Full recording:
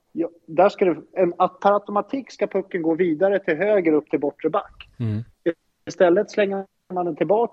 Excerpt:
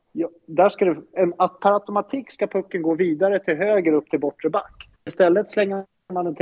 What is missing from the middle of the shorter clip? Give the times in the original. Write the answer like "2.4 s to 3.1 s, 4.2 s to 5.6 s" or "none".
5.0 s to 5.8 s